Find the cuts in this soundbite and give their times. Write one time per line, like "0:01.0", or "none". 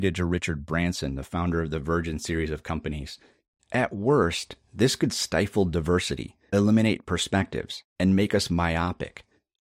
0:03.6